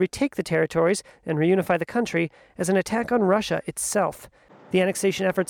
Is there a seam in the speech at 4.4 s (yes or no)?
no